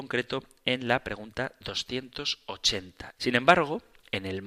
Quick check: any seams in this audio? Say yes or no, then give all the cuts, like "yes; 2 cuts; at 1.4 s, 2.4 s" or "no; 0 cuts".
yes; 1 cut; at 3.2 s